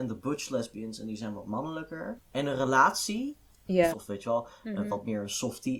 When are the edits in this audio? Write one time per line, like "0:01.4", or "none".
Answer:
0:02.1
0:03.9